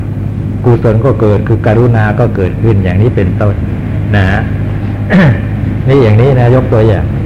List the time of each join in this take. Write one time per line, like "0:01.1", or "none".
none